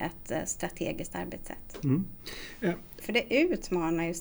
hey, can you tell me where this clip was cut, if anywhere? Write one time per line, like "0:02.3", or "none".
0:03.0